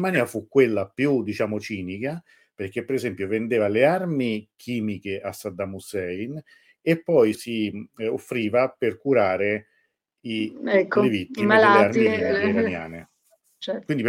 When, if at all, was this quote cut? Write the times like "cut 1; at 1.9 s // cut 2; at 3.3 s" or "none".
cut 1; at 7.3 s